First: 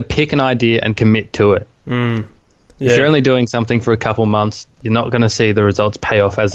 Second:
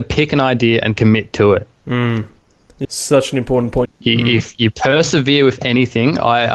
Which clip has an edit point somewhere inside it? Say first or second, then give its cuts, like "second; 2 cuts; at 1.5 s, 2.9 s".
second; 2 cuts; at 2.8 s, 3.9 s